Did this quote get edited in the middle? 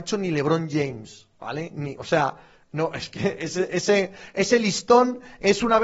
no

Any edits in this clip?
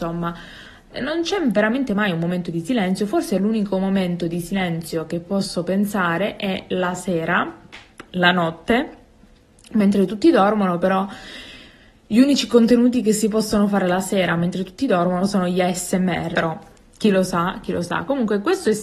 yes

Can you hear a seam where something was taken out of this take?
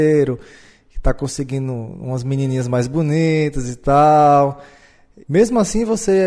yes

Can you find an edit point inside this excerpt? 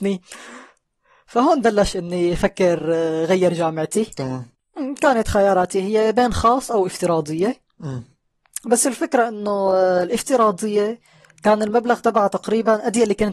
no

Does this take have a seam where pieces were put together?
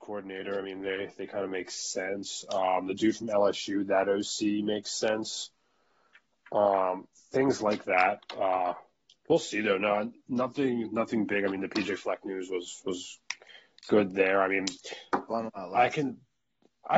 no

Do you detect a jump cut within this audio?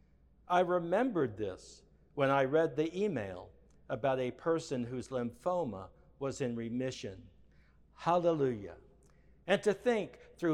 no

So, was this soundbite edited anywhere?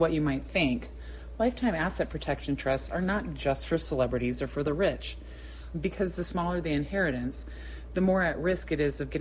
yes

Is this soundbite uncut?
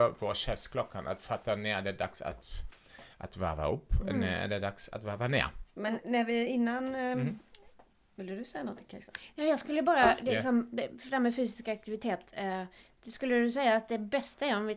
yes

